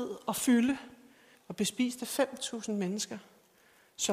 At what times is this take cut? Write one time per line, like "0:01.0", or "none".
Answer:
0:01.3